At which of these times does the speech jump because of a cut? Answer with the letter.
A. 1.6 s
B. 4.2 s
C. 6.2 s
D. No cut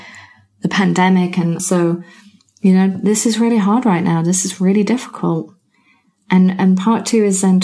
A